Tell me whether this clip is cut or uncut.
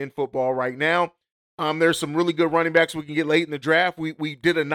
uncut